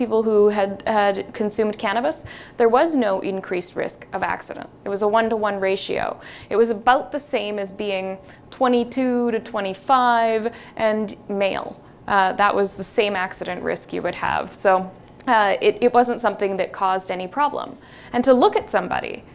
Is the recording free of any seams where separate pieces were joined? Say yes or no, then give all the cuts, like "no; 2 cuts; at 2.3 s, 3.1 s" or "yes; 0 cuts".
yes; 0 cuts